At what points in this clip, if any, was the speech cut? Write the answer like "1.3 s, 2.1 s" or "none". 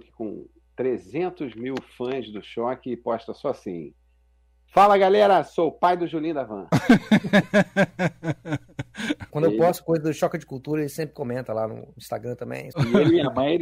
9.3 s, 12.7 s